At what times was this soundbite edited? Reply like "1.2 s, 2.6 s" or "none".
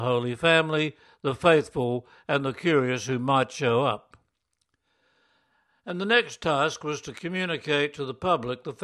none